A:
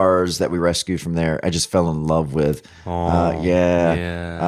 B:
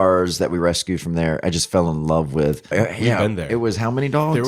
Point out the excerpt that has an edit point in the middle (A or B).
B